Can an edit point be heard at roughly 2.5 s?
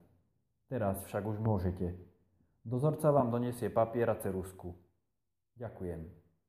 no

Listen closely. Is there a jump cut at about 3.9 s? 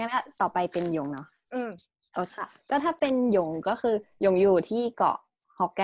no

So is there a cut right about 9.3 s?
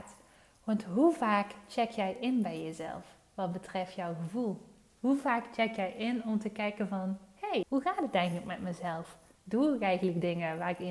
yes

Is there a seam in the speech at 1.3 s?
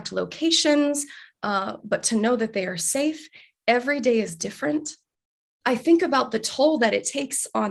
no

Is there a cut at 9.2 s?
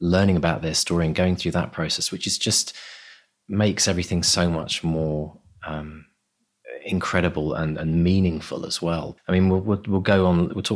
yes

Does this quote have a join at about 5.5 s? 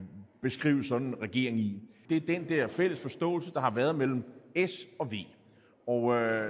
no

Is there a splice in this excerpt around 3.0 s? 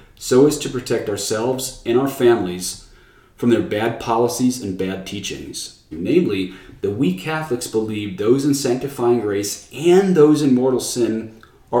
no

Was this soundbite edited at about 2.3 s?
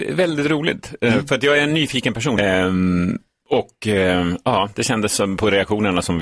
yes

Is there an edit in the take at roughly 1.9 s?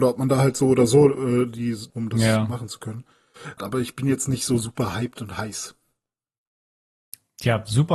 yes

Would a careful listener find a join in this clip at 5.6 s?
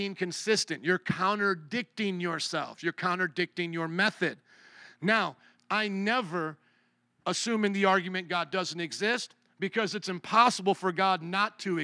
yes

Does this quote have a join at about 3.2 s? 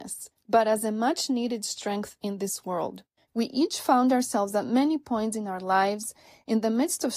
yes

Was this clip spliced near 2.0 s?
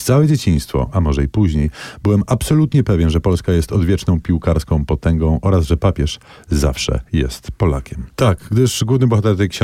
no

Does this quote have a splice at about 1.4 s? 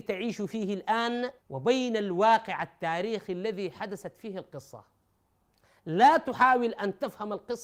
yes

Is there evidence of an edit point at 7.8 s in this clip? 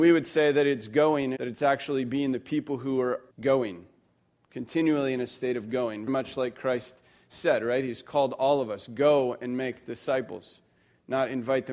no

